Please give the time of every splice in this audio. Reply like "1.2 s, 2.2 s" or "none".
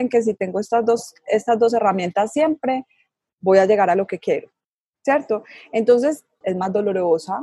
6.4 s